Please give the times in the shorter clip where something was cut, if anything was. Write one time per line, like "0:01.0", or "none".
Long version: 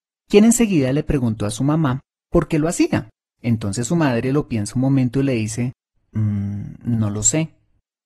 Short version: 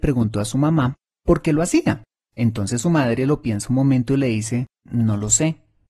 0:04.9